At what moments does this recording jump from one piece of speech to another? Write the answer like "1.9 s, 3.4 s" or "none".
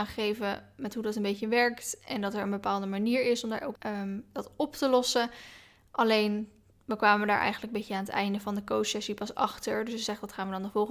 3.8 s